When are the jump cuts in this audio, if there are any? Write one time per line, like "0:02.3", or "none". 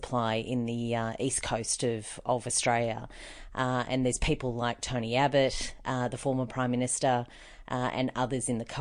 none